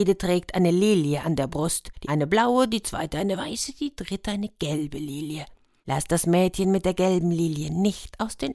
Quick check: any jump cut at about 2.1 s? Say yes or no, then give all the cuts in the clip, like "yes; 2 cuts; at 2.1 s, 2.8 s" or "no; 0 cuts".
yes; 1 cut; at 2.1 s